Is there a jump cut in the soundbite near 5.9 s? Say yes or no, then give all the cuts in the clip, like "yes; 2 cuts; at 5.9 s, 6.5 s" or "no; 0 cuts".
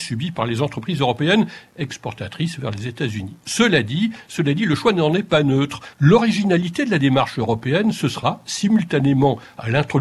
yes; 1 cut; at 5.9 s